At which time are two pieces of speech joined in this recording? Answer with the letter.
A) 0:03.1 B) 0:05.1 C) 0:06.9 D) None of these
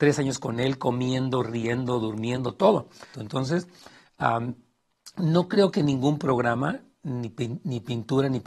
A